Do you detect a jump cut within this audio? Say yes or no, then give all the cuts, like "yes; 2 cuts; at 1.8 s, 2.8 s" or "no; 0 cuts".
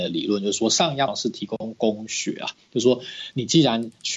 yes; 1 cut; at 1.1 s